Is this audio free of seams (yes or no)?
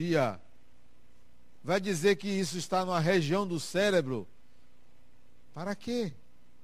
yes